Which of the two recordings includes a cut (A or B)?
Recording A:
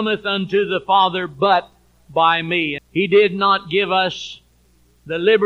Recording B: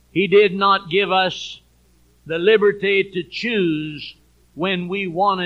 A